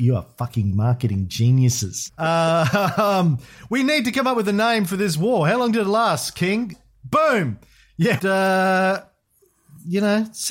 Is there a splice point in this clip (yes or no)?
yes